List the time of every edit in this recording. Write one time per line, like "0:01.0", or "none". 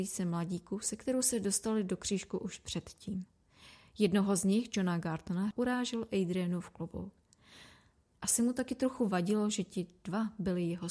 0:05.5